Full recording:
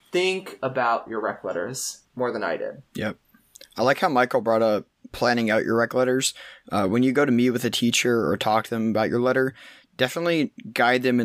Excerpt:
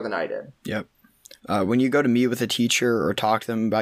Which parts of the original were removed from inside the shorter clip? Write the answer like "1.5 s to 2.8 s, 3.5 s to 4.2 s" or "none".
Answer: 3.7 s to 6.6 s